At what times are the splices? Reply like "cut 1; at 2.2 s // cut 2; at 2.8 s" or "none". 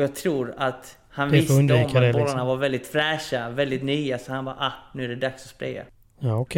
none